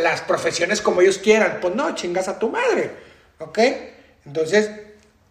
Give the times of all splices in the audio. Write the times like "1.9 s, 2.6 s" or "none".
none

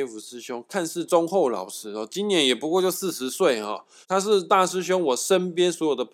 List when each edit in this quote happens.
4.0 s

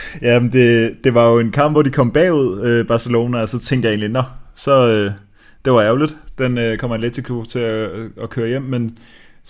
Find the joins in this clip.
none

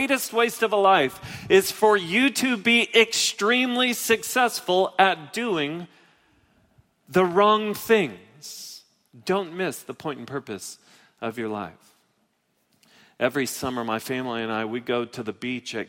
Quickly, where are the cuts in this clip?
9.1 s

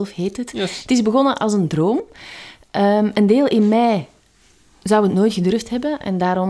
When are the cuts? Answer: none

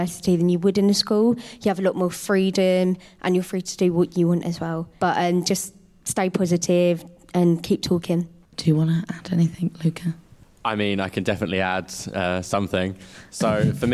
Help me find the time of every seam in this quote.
none

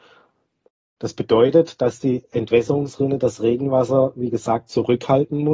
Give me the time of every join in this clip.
1.0 s

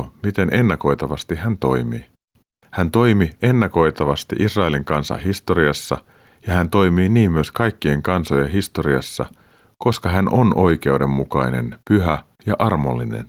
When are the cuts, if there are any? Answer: none

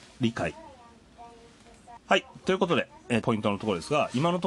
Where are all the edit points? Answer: 2.0 s, 3.2 s

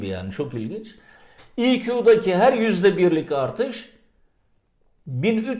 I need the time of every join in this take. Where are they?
1.4 s

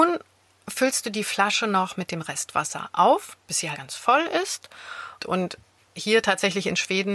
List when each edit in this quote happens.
3.7 s, 5.2 s

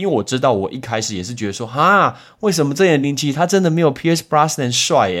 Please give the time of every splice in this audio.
3.0 s

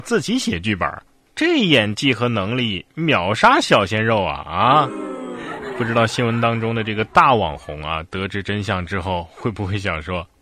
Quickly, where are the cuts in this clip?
none

